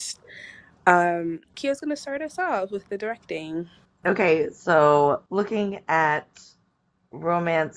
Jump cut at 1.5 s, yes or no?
yes